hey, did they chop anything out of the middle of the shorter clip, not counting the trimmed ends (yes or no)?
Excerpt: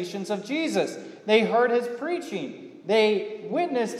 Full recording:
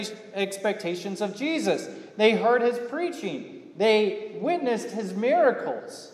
no